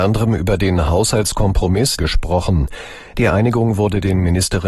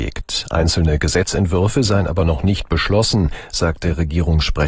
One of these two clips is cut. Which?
first; 1 cut; at 2.0 s

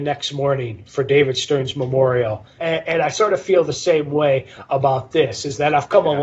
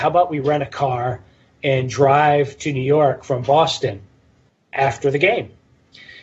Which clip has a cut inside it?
first; 1 cut; at 2.6 s

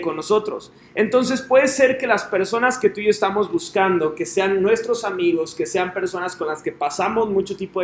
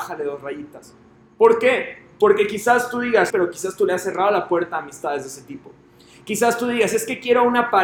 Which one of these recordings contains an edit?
second; 1 cut; at 3.3 s

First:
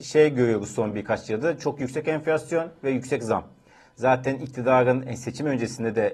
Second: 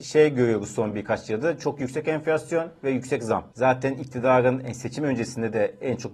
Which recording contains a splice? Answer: second; 1 cut; at 3.5 s

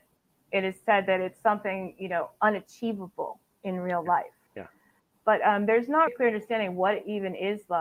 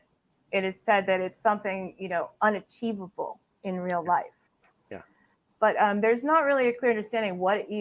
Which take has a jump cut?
first; 2 cuts; at 4.5 s, 6.1 s

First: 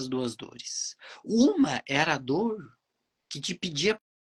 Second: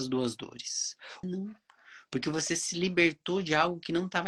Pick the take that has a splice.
second; 1 cut; at 1.2 s

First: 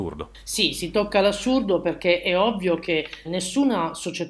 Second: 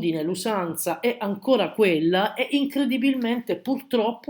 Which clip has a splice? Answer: first; 1 cut; at 3.2 s

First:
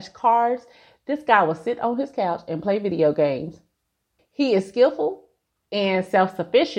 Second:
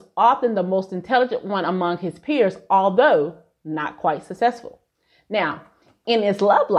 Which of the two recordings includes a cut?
first; 1 cut; at 4.2 s

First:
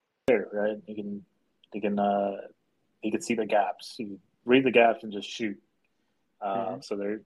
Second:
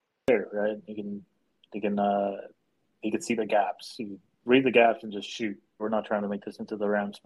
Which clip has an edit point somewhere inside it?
second; 1 cut; at 5.8 s

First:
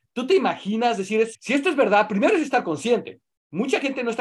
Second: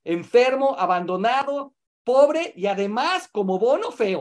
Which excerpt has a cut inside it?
first; 1 cut; at 1.3 s

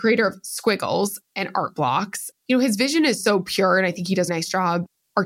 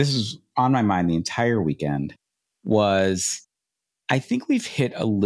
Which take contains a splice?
first; 2 cuts; at 2.4 s, 4.3 s

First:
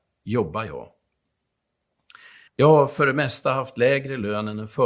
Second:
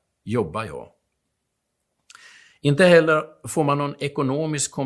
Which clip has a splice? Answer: first; 1 cut; at 2.5 s

